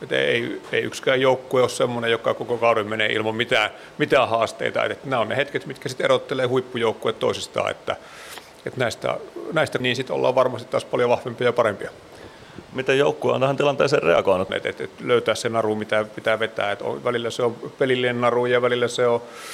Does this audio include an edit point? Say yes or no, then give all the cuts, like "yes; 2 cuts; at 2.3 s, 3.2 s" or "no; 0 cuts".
yes; 2 cuts; at 9.8 s, 14.5 s